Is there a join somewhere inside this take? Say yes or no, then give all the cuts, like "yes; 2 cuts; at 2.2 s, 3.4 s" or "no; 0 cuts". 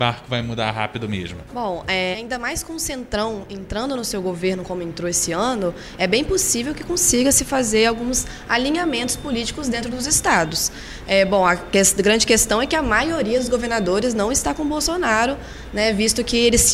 yes; 1 cut; at 2.1 s